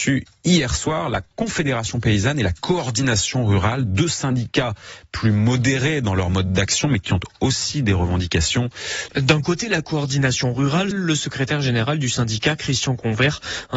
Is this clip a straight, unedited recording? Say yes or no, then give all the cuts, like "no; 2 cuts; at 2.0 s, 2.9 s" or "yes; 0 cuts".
no; 2 cuts; at 9.1 s, 10.9 s